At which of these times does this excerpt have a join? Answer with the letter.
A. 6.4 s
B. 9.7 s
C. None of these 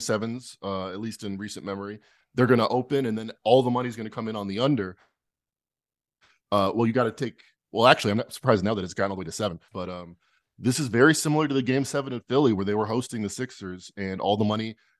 B